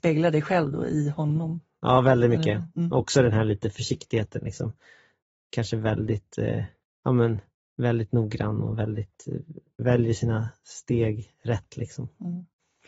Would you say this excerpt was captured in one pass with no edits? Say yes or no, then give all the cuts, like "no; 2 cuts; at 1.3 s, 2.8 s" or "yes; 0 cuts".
yes; 0 cuts